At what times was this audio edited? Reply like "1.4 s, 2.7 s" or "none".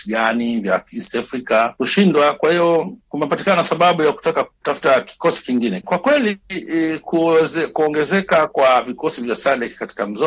5.8 s